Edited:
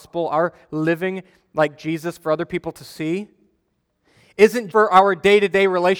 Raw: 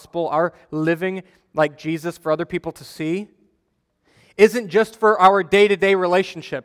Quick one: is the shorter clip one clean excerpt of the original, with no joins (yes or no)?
no